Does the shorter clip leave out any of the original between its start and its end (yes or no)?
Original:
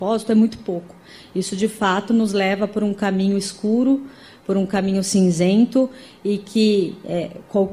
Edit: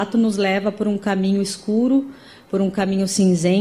no